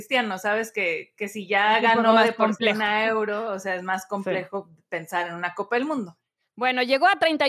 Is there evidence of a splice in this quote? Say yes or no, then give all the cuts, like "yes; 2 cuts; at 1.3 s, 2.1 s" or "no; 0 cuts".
no; 0 cuts